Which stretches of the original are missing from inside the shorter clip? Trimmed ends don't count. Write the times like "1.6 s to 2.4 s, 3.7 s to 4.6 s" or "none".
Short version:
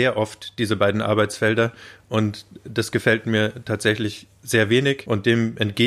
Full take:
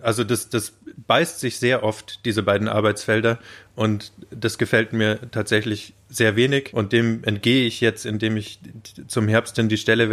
none